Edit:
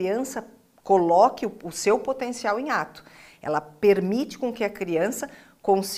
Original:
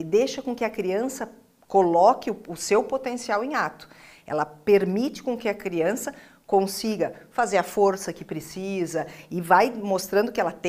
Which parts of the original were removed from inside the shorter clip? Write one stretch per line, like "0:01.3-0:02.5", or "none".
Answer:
none